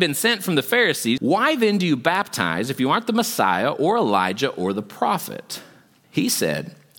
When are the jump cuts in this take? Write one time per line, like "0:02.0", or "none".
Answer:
0:01.2
0:06.0